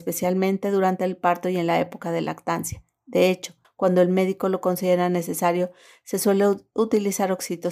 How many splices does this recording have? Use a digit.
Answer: 1